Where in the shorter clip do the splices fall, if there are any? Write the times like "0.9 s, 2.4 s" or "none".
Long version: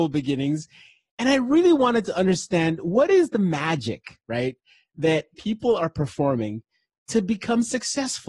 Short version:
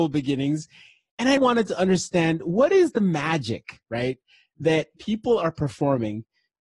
1.4 s